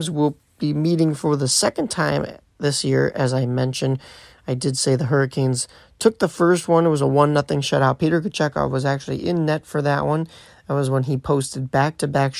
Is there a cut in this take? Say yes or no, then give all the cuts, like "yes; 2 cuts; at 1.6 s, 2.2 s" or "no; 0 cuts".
no; 0 cuts